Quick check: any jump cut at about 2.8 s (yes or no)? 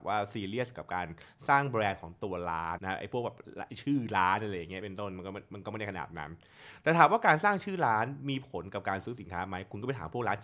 yes